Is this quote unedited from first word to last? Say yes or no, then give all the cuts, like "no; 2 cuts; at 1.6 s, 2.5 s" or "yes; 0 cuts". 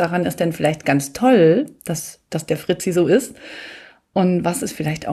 yes; 0 cuts